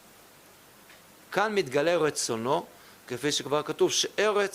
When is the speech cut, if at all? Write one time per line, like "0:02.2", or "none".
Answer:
0:01.3